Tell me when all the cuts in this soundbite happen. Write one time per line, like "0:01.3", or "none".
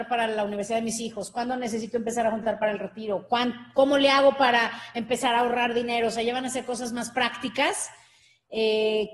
none